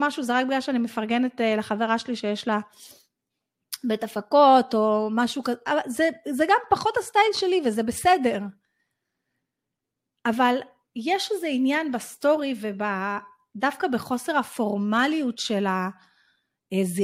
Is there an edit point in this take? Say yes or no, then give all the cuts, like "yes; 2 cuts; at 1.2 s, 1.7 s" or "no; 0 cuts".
no; 0 cuts